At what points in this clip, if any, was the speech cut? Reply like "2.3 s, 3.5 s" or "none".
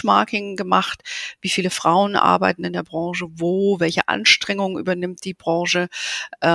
none